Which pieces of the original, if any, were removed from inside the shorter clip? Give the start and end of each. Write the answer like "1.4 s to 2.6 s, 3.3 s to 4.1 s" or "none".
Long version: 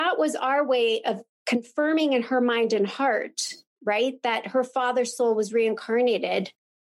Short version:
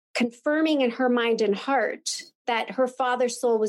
3.8 s to 4.2 s